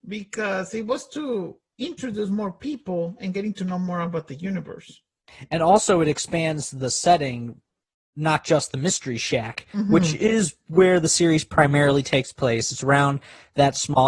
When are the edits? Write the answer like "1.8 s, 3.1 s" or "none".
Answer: none